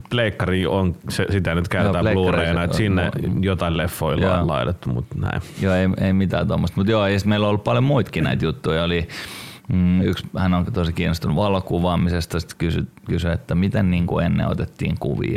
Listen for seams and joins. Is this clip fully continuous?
yes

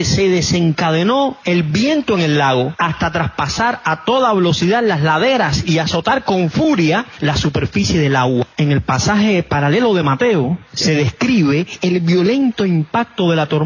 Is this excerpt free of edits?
yes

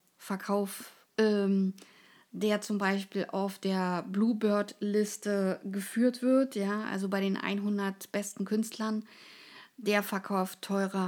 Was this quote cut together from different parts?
yes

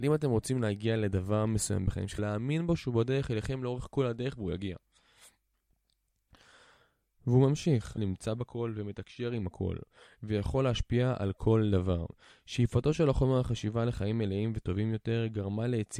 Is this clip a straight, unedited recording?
no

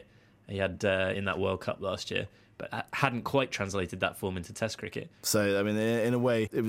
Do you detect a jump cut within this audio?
yes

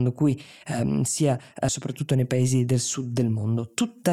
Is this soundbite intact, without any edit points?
no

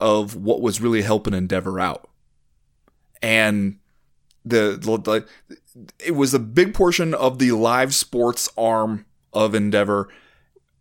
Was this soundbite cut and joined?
no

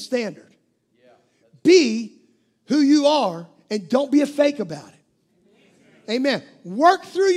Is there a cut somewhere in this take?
no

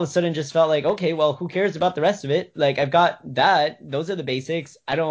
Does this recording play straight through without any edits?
yes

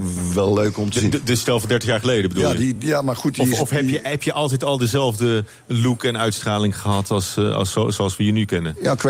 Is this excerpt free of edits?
yes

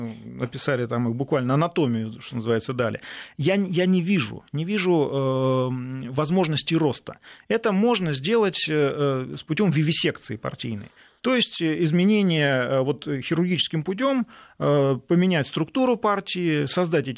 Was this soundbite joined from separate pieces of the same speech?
no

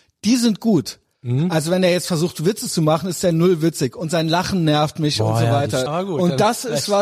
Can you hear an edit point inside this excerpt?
yes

